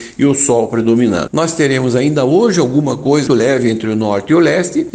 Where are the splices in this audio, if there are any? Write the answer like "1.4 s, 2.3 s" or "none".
1.3 s, 3.3 s

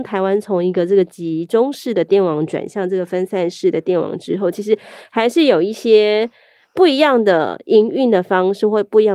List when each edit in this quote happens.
none

